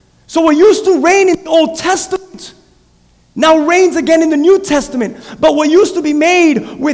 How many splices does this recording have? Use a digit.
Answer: 0